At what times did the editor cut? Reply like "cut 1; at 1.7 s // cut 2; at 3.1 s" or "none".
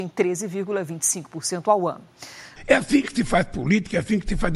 cut 1; at 2.6 s

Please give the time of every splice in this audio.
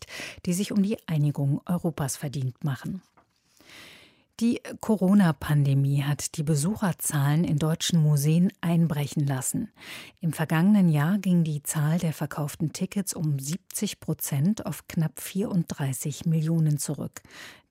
none

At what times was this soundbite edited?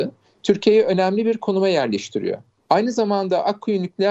none

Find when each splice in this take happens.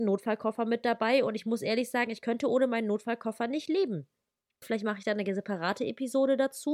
cut 1; at 4.6 s

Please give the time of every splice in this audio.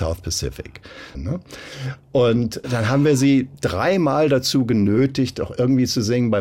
cut 1; at 1.1 s // cut 2; at 2.6 s

